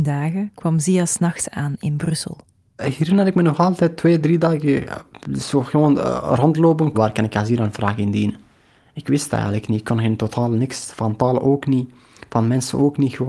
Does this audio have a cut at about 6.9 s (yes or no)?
yes